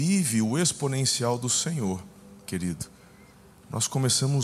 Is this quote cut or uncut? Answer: cut